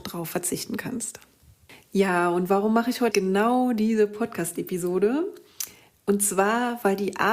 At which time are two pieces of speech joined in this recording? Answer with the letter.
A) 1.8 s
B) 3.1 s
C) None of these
B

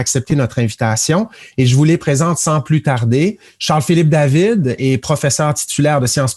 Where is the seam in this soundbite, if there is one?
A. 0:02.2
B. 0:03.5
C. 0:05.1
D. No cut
D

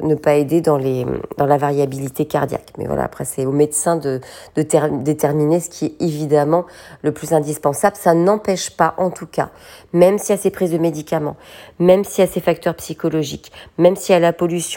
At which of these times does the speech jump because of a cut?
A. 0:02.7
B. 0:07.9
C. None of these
C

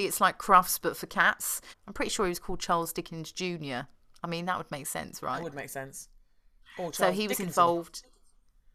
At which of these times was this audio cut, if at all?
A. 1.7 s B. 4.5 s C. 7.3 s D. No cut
A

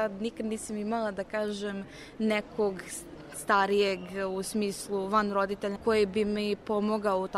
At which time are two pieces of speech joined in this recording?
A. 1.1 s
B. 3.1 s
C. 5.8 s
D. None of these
C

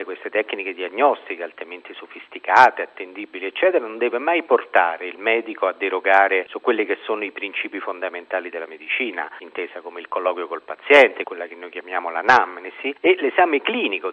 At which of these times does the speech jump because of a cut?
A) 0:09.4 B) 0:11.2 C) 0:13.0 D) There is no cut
D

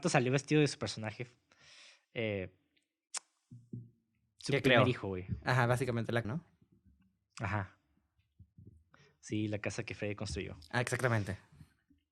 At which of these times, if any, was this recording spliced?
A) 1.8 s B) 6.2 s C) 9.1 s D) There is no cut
B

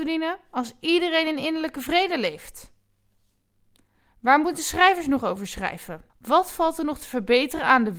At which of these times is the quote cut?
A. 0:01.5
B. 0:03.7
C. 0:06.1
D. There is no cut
C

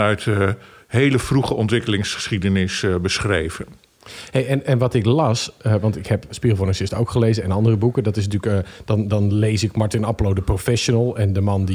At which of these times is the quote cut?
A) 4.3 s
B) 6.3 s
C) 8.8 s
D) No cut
B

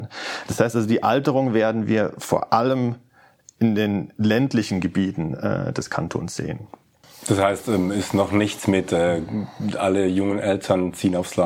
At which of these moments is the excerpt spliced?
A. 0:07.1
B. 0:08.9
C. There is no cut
C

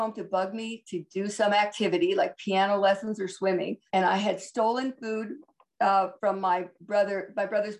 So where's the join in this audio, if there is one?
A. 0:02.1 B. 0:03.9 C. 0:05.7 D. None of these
B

